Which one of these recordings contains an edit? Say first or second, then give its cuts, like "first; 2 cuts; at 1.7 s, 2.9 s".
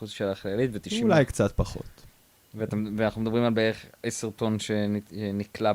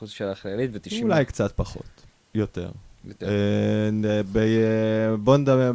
second; 1 cut; at 2.2 s